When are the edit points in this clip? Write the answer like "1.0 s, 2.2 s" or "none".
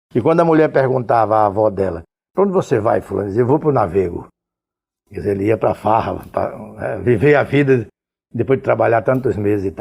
none